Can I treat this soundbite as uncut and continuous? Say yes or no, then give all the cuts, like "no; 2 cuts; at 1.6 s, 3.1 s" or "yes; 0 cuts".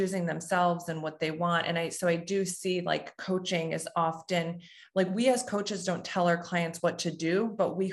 yes; 0 cuts